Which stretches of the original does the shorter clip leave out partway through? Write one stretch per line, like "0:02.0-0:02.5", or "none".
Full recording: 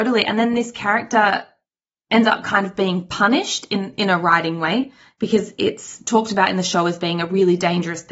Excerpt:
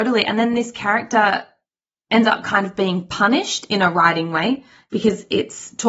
0:03.7-0:04.0